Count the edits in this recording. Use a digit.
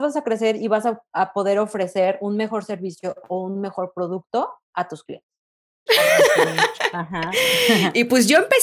1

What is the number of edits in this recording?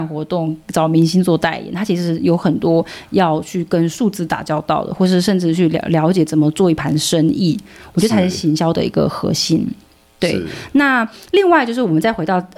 0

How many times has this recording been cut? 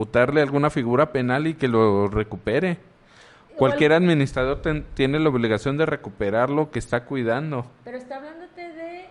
0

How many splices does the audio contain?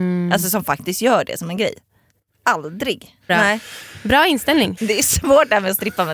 2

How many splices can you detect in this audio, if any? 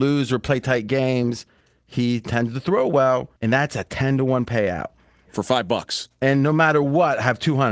2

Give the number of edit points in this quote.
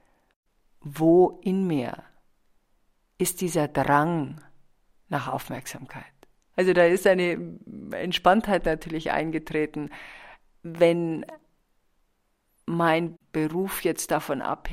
1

